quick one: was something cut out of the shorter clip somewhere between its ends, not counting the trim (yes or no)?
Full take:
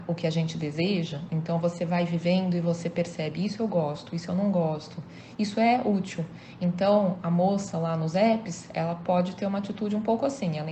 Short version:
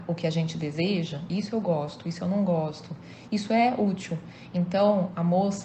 yes